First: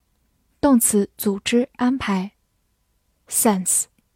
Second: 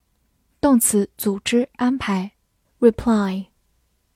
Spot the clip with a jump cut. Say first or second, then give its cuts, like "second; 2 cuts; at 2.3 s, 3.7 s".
second; 1 cut; at 2.6 s